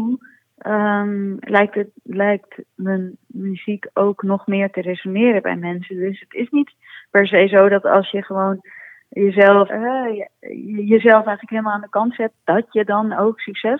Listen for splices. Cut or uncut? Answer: cut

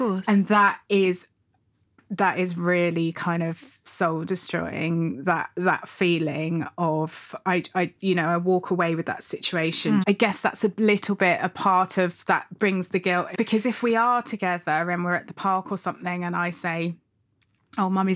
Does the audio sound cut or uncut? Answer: cut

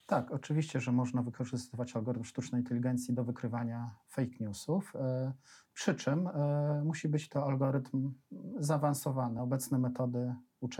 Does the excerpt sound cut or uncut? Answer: uncut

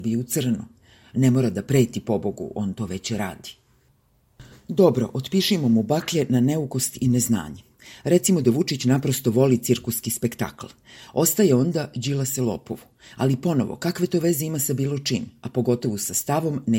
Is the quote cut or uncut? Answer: cut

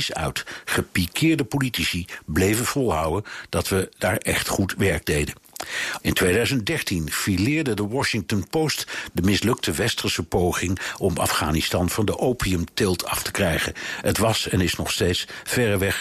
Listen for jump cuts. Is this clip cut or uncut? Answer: cut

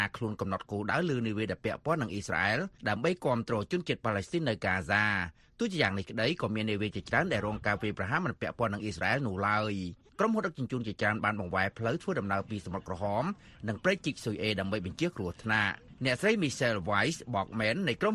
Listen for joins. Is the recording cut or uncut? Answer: cut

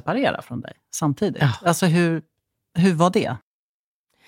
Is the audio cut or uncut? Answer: uncut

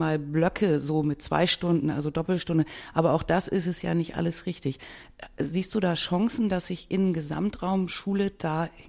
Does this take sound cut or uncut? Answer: uncut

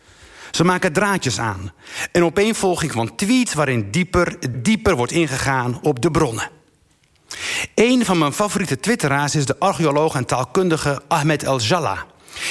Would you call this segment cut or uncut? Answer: cut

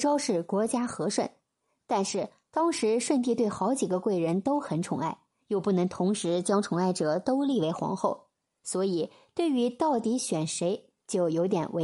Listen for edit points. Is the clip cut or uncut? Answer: uncut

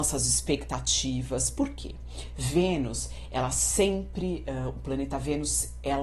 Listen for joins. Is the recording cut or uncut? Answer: uncut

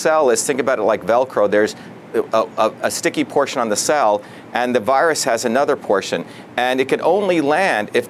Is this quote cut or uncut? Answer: uncut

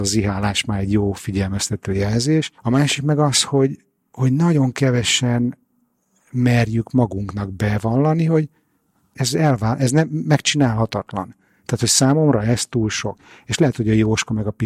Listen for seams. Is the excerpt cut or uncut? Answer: cut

